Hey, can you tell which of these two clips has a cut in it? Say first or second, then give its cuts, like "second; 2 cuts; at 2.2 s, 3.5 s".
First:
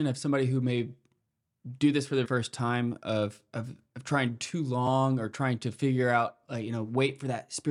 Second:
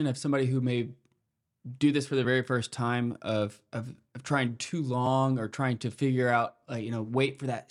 first; 1 cut; at 2.2 s